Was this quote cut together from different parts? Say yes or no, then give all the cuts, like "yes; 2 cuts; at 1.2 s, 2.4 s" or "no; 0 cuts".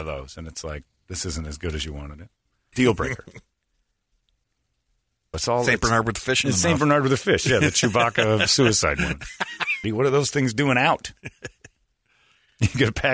yes; 3 cuts; at 2.7 s, 5.3 s, 9.8 s